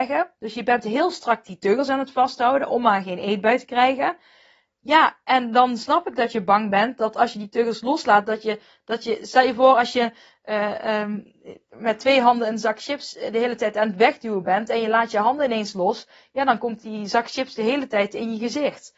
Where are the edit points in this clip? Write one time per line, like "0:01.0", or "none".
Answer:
none